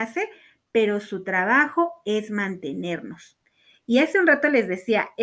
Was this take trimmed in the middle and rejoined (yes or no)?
yes